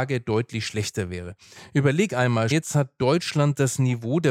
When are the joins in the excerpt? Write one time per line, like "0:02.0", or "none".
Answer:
0:02.5